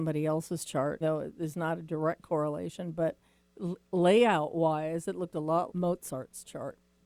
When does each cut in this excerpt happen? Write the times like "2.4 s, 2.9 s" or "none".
1.0 s, 5.7 s